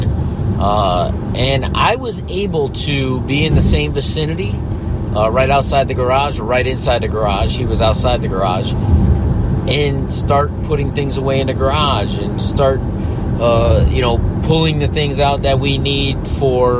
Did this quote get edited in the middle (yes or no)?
no